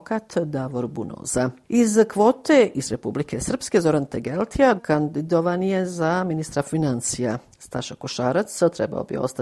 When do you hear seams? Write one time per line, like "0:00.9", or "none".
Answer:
0:04.8

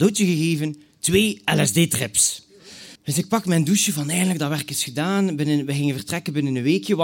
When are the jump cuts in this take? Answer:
0:03.0

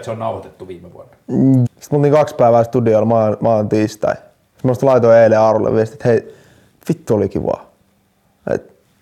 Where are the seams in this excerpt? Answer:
0:01.7

